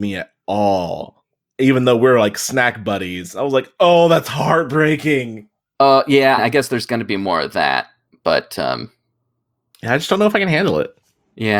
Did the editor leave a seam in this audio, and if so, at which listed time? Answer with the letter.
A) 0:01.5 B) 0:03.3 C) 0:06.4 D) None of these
C